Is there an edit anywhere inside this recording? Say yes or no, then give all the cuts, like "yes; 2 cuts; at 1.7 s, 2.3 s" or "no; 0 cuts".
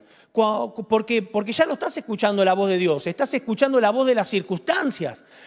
no; 0 cuts